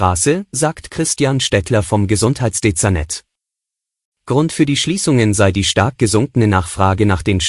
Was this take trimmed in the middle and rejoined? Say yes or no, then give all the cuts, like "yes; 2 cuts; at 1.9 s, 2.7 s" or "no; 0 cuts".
no; 0 cuts